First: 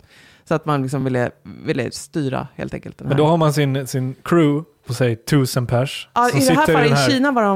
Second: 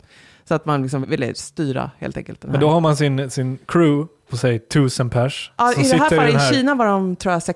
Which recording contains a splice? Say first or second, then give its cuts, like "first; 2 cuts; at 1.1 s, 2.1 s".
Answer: second; 1 cut; at 1.0 s